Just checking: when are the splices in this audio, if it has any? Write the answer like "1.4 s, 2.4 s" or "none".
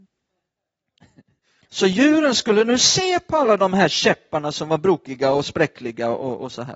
1.6 s